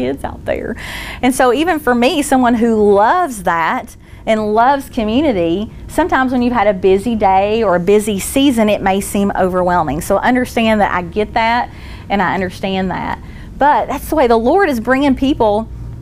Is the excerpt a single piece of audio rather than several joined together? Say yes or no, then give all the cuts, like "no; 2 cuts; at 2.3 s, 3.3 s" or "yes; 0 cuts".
yes; 0 cuts